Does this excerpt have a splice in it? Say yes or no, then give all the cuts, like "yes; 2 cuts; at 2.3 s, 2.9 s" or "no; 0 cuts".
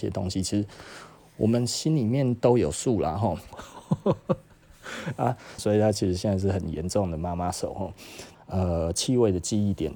yes; 3 cuts; at 3.5 s, 5.6 s, 8.3 s